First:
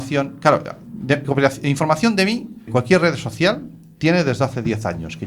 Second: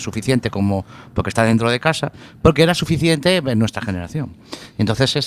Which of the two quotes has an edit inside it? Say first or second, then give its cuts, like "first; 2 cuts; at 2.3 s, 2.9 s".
first; 2 cuts; at 1.2 s, 2.7 s